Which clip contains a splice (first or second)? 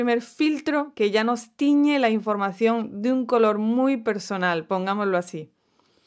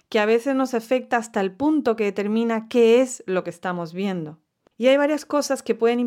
second